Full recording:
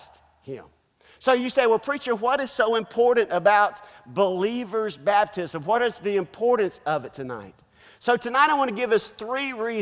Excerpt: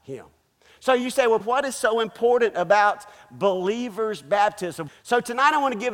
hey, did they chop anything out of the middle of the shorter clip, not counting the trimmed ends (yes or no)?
yes